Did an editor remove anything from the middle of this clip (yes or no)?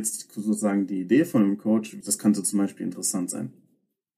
yes